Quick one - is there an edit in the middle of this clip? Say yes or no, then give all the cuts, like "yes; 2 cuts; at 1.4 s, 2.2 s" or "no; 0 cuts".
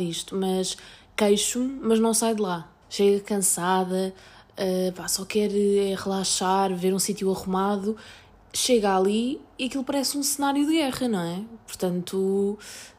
yes; 1 cut; at 2.8 s